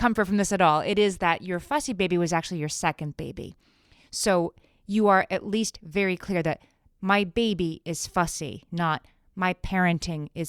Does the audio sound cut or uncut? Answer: uncut